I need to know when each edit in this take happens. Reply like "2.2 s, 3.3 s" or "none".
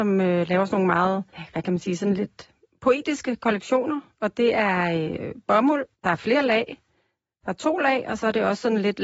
1.3 s, 5.9 s